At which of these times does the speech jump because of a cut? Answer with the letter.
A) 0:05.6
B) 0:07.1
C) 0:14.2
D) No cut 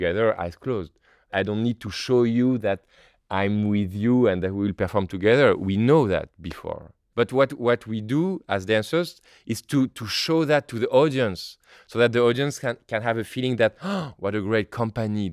C